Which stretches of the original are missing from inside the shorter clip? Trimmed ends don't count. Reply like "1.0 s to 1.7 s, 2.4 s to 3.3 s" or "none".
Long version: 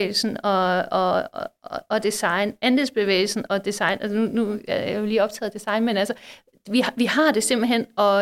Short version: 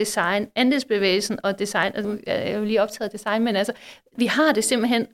4.1 s to 4.5 s, 6.6 s to 6.9 s